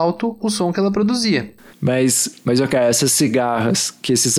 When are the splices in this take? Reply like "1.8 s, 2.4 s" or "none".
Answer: 1.7 s

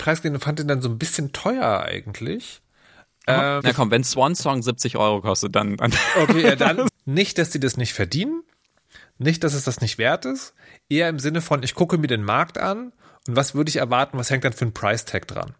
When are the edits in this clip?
3.6 s, 6.9 s

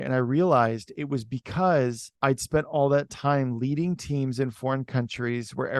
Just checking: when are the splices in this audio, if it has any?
2.2 s

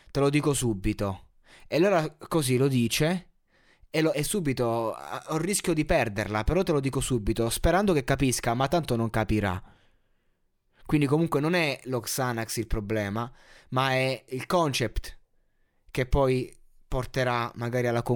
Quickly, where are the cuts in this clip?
4.1 s, 14.3 s

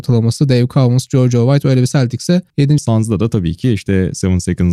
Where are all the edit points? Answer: 2.8 s

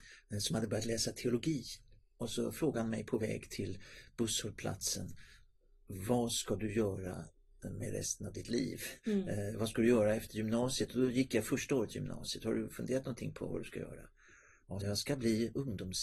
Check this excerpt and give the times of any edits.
14.8 s

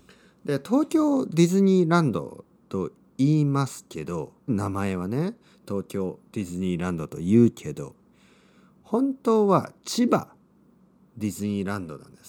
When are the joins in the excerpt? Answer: 4.5 s

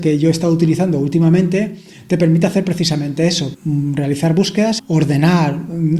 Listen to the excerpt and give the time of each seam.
3.5 s, 4.8 s

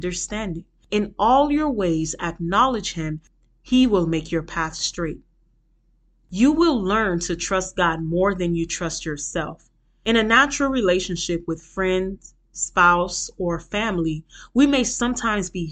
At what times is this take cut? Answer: none

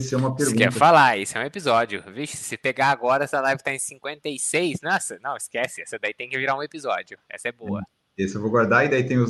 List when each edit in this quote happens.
none

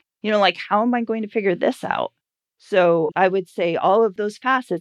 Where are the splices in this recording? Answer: 3.1 s

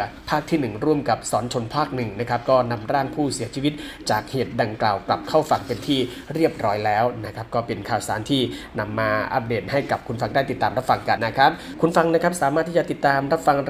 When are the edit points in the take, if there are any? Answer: 11.2 s

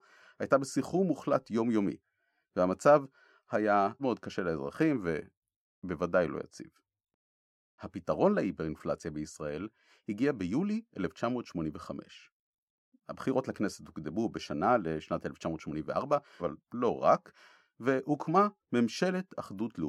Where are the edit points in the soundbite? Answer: 4.0 s, 16.4 s

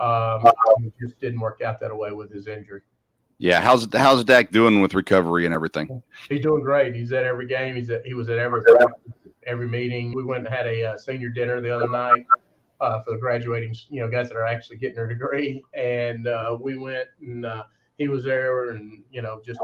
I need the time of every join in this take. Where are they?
10.1 s

